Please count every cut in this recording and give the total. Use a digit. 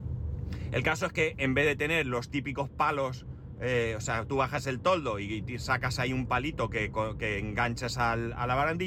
0